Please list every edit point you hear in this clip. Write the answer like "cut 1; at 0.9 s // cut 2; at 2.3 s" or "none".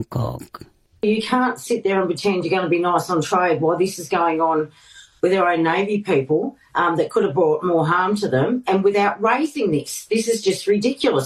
none